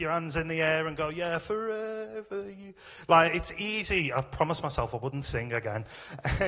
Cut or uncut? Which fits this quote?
uncut